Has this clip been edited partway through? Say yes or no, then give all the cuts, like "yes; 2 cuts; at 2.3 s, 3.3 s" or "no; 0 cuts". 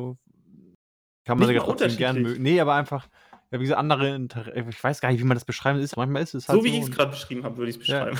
yes; 1 cut; at 5.9 s